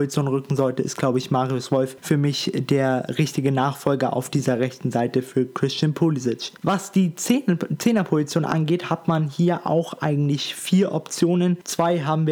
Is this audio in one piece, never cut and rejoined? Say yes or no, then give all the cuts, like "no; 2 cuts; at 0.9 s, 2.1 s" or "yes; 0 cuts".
yes; 0 cuts